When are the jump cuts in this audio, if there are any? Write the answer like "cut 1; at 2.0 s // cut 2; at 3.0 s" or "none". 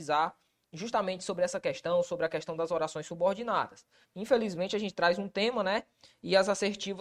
cut 1; at 4.0 s